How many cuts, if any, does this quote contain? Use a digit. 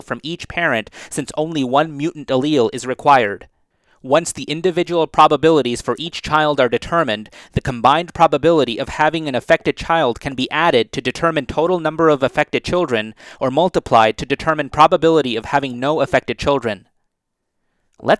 0